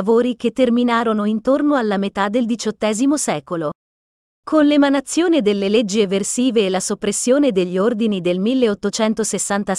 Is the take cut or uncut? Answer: uncut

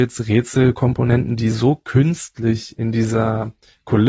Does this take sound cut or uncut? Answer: uncut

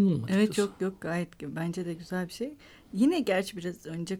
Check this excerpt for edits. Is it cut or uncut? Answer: uncut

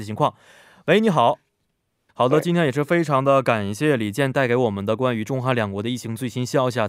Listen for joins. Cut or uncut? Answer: cut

